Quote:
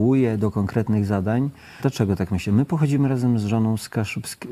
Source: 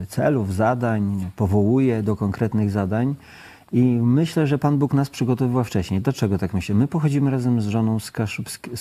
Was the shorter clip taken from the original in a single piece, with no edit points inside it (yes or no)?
no